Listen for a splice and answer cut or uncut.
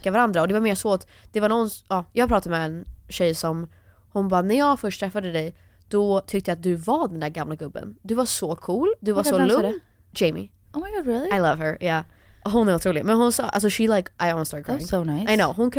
uncut